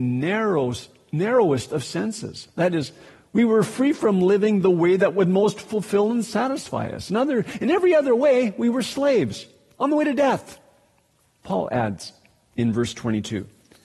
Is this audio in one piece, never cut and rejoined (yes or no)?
yes